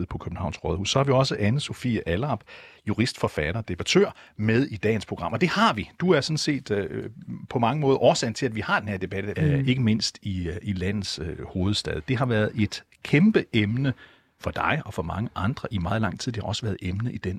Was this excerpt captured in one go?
no; 1 cut; at 9.4 s

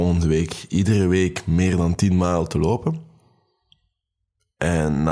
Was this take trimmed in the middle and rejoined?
no; 0 cuts

